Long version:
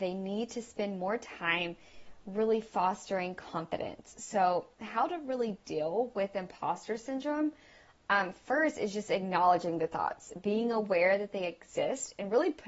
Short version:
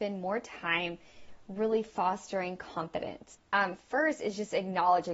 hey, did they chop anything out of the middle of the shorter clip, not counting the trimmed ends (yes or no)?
yes